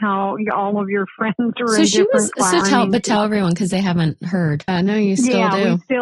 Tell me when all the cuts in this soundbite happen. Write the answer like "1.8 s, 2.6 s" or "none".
2.6 s, 4.7 s